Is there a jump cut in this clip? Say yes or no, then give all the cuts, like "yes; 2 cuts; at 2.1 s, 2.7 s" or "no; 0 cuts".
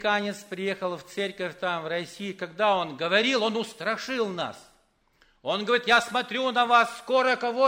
no; 0 cuts